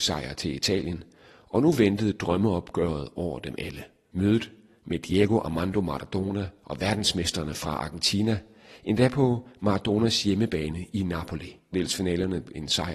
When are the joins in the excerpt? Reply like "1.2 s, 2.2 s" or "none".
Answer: 11.7 s